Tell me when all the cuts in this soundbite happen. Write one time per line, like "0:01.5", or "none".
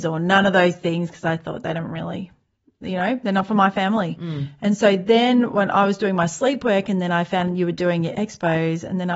none

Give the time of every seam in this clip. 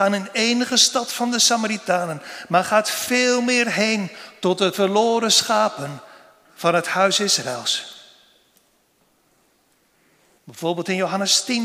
0:10.4

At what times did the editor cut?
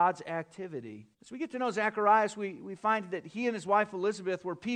0:01.1

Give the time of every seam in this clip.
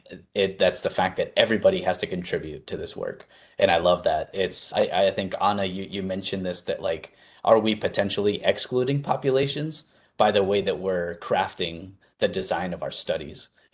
0:04.7

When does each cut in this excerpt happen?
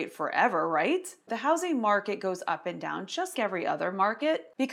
0:01.3
0:03.3

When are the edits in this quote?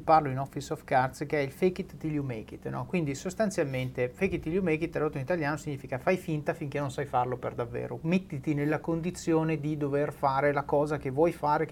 none

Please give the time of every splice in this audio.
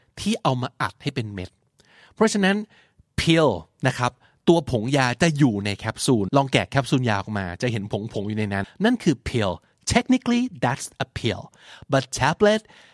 0:06.3
0:08.6

